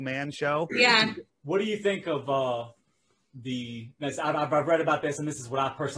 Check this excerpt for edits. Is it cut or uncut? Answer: cut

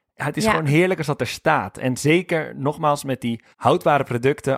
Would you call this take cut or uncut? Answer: cut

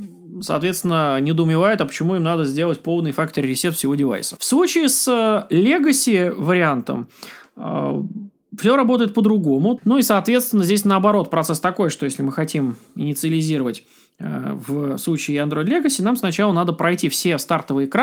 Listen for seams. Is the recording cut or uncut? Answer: cut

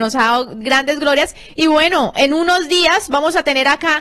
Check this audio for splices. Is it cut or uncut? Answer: uncut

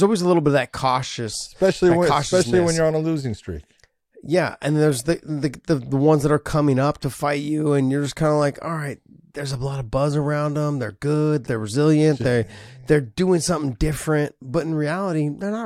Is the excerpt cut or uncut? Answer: cut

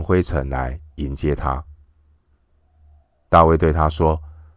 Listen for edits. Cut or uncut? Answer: uncut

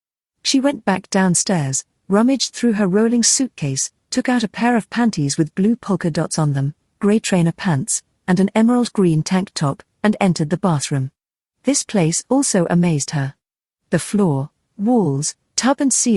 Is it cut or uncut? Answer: uncut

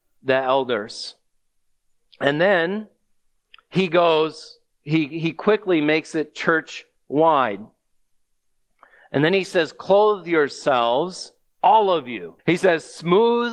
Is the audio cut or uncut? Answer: cut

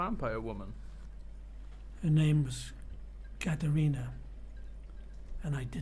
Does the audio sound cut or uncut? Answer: cut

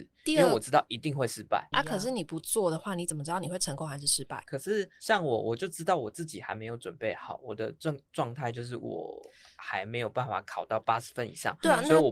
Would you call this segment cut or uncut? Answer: cut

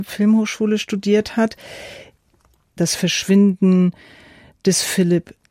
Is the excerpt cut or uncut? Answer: cut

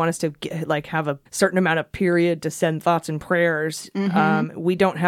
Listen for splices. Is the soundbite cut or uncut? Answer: cut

